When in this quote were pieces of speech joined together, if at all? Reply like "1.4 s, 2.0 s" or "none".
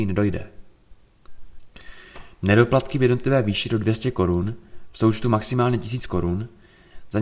none